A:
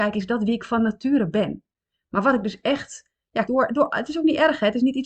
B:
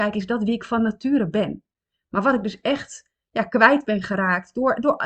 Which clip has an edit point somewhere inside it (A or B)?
A